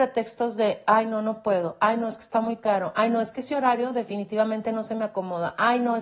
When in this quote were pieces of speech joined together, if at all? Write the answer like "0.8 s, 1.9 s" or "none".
none